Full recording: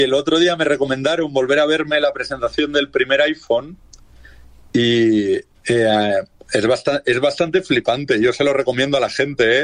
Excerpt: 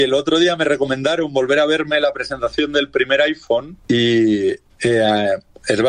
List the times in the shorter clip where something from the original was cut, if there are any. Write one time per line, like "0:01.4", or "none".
0:03.8